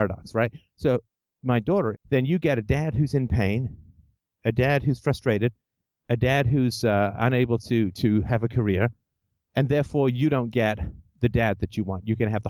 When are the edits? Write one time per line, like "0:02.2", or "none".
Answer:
0:01.9

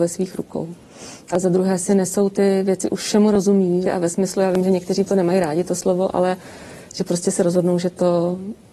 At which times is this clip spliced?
0:01.3
0:03.8

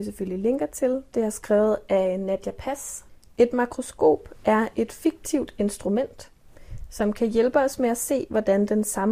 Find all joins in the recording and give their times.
none

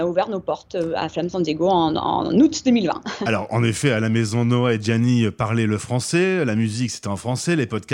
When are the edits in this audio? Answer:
none

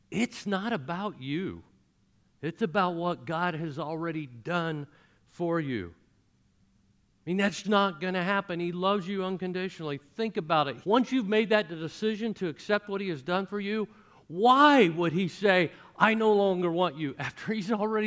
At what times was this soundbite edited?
0:07.6
0:10.8

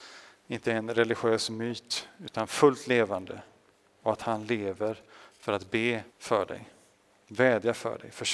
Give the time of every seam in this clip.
0:06.1

